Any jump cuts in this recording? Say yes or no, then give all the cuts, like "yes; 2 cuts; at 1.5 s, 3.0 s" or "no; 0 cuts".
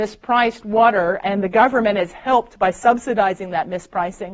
yes; 1 cut; at 1.2 s